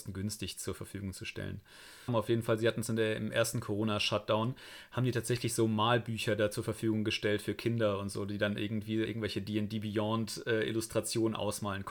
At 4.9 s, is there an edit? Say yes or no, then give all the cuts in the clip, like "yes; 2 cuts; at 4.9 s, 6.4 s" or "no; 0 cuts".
no; 2 cuts; at 2.1 s, 9.0 s